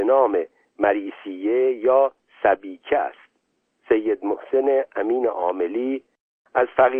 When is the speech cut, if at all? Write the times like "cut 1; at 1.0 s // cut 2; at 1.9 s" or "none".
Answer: none